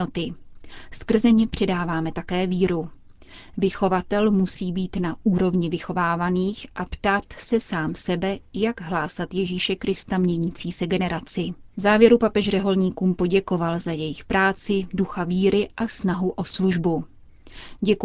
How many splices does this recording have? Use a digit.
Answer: 1